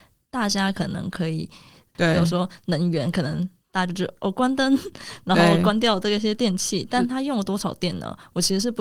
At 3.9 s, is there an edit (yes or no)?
no